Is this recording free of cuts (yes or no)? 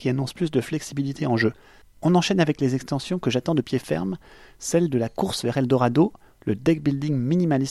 no